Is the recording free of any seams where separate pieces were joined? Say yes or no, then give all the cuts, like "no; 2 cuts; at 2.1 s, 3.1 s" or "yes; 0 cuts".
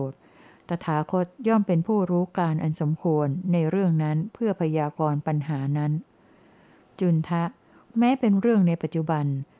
yes; 0 cuts